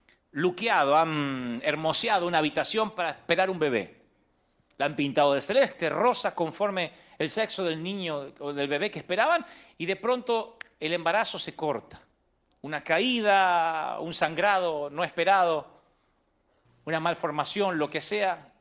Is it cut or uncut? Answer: uncut